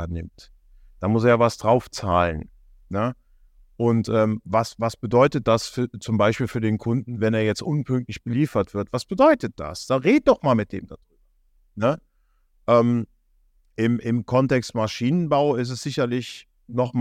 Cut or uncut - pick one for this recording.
uncut